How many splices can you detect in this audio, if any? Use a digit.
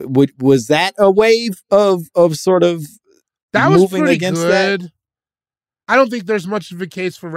1